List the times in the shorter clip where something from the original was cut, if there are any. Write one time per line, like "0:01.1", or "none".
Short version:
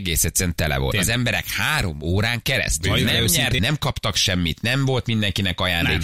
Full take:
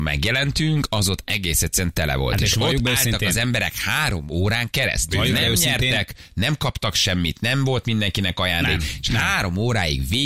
0:00.9
0:03.6